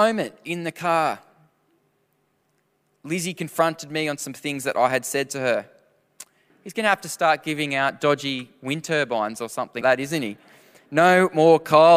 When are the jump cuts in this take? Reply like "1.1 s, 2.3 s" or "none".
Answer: 6.5 s, 9.8 s